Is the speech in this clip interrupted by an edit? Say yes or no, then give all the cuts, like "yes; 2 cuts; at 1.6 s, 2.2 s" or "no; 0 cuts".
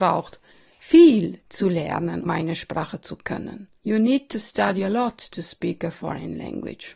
yes; 2 cuts; at 2.2 s, 3.8 s